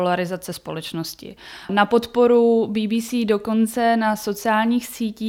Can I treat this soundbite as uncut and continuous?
no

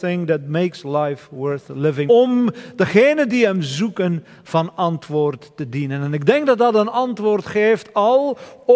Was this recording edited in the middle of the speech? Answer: yes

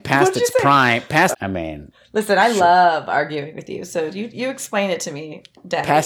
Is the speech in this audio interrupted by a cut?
yes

